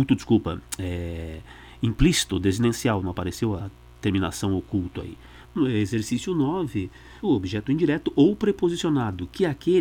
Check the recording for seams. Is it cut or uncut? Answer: cut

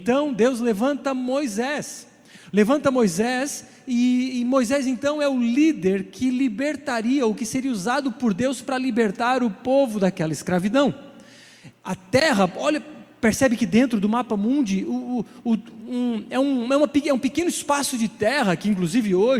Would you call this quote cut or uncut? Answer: uncut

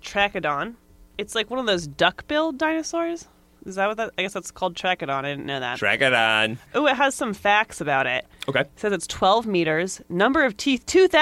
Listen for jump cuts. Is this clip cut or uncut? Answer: uncut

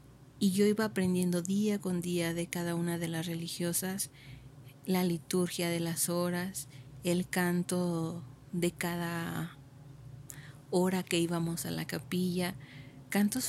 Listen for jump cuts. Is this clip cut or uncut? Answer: uncut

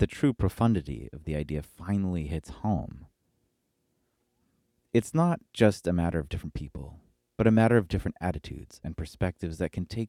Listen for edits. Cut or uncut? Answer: cut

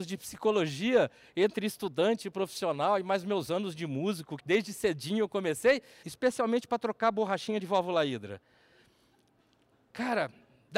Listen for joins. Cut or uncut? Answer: cut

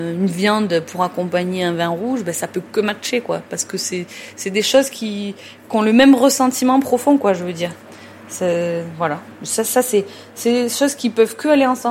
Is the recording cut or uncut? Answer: uncut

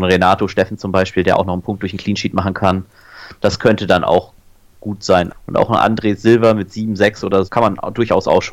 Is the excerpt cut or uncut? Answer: cut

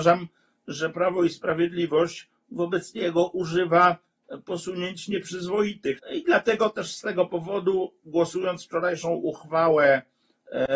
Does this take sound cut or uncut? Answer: cut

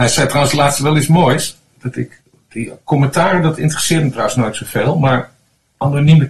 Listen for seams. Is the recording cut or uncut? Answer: cut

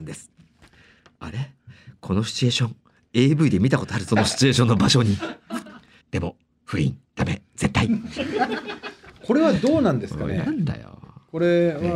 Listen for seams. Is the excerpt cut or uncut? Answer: cut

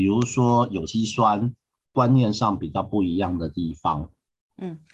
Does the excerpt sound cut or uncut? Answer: cut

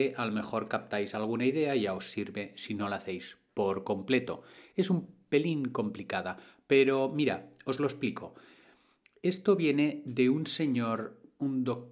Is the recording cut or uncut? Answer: uncut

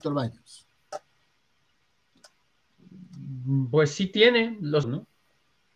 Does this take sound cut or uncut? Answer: cut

